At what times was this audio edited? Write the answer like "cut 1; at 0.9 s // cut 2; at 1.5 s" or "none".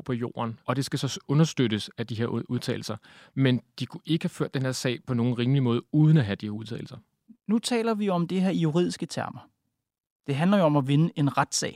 none